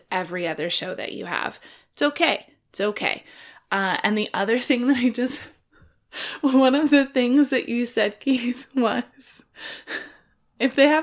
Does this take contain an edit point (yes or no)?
no